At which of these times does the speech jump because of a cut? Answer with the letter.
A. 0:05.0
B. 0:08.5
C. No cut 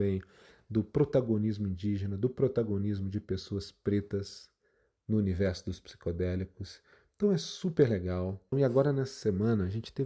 B